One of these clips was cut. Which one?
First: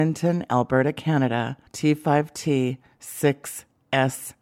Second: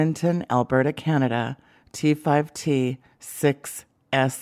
first; 1 cut; at 1.7 s

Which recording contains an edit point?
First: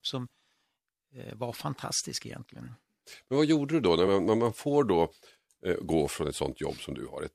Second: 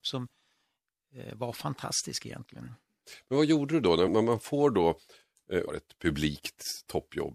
second; 2 cuts; at 4.1 s, 5.7 s

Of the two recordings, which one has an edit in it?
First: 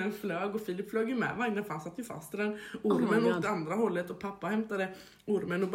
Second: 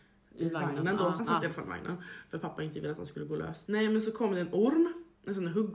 second; 2 cuts; at 1.2 s, 3.6 s

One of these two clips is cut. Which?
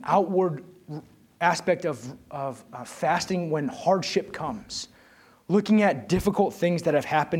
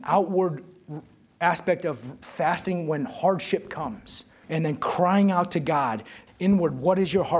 second; 3 cuts; at 2.2 s, 4.4 s, 6.3 s

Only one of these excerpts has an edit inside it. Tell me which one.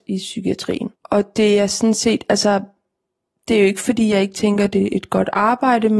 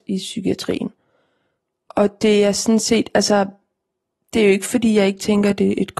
first; 1 cut; at 1.0 s

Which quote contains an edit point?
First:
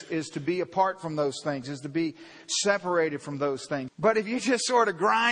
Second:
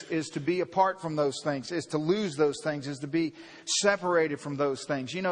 first; 2 cuts; at 1.6 s, 3.9 s

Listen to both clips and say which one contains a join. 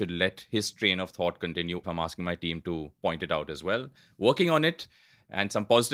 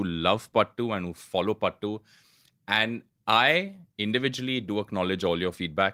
first; 1 cut; at 1.8 s

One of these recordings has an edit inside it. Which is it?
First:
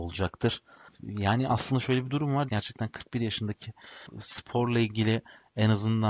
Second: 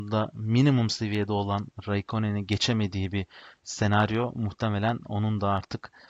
first; 1 cut; at 2.5 s

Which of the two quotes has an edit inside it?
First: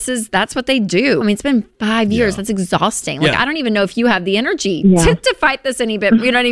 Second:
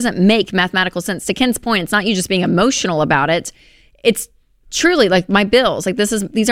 first; 1 cut; at 1.2 s

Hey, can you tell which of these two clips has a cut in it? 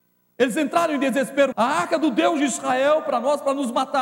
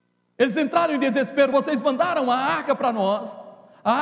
first; 1 cut; at 1.5 s

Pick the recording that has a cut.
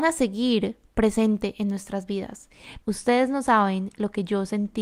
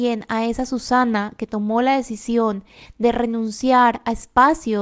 first; 1 cut; at 2.8 s

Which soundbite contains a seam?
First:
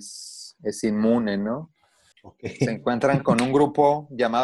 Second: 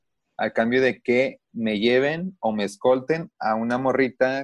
first; 1 cut; at 2.1 s

